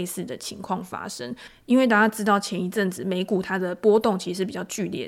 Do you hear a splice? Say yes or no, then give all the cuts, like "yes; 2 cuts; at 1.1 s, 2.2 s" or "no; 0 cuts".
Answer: no; 0 cuts